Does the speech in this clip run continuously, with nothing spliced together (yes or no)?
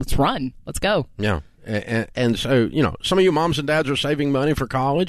yes